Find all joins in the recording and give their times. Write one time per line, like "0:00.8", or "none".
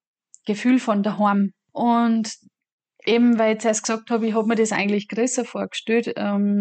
none